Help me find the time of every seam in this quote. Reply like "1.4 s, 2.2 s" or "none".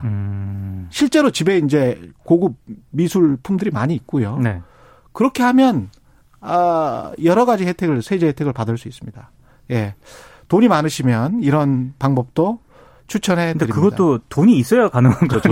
none